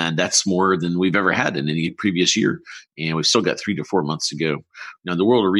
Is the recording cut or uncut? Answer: uncut